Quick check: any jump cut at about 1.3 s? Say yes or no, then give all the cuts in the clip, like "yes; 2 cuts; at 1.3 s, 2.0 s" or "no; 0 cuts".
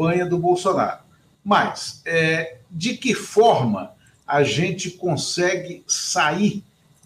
yes; 1 cut; at 1.3 s